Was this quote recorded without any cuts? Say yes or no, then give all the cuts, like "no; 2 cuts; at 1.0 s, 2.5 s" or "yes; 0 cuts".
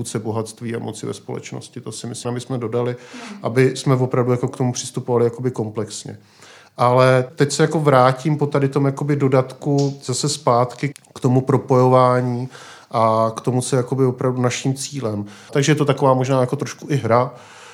no; 2 cuts; at 2.2 s, 15.5 s